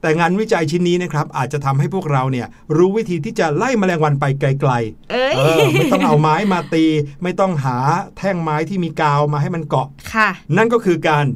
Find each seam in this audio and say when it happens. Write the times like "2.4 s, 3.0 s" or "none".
none